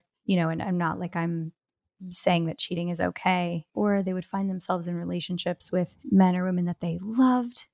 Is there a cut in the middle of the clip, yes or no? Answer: yes